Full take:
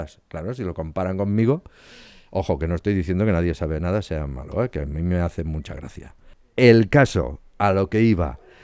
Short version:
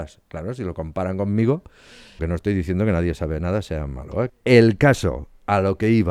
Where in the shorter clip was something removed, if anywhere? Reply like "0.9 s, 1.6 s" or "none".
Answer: 2.2 s, 4.3 s